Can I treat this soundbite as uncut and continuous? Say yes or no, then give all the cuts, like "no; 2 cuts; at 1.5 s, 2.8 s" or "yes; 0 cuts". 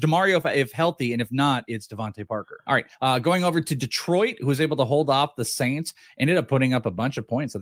no; 1 cut; at 2.6 s